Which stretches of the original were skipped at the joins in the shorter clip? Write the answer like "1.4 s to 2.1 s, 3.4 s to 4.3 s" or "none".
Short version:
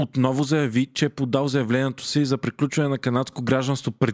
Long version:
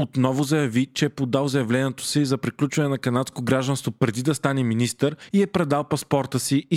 none